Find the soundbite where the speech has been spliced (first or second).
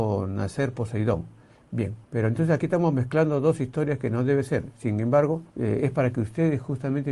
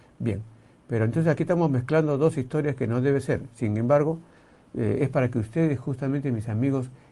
first